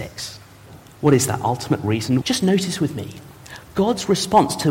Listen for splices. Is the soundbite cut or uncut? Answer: cut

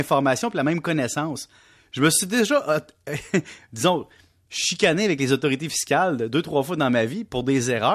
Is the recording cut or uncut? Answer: uncut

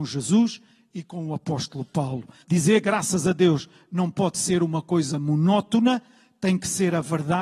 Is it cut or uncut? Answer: cut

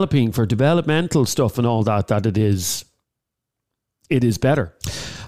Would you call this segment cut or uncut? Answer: uncut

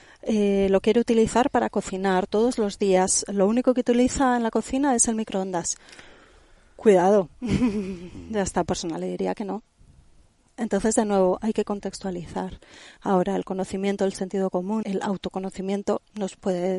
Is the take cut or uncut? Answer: cut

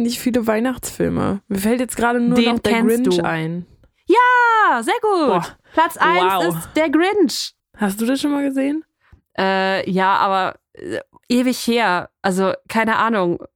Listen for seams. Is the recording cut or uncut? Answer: cut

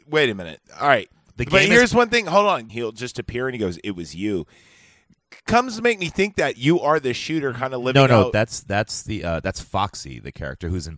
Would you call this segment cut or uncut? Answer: cut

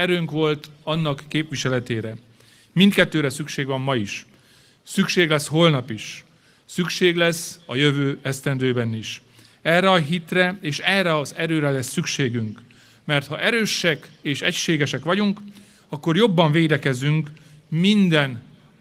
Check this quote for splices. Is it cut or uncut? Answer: uncut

